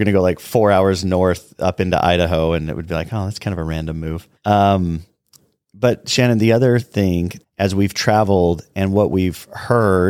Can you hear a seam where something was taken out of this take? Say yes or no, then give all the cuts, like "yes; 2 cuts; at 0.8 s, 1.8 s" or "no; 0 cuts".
yes; 2 cuts; at 4.4 s, 7.4 s